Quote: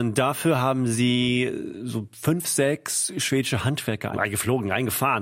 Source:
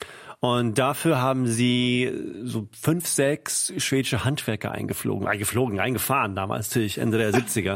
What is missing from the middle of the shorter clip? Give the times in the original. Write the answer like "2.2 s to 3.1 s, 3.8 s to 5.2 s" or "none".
4.7 s to 5.2 s